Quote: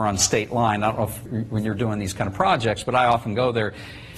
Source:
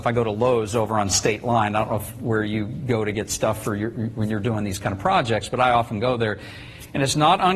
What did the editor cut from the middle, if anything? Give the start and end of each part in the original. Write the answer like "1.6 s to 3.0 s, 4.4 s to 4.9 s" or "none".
2.2 s to 3.9 s